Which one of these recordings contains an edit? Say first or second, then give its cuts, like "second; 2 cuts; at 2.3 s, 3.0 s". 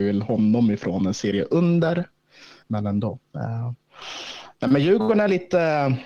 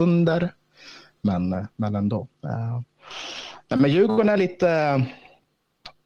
first; 1 cut; at 2.6 s